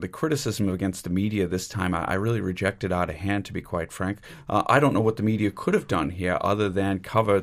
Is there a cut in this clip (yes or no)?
no